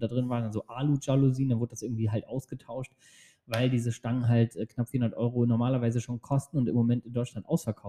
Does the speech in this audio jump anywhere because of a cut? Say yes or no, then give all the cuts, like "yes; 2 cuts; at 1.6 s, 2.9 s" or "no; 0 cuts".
no; 0 cuts